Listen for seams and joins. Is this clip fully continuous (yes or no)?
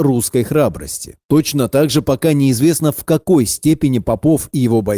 no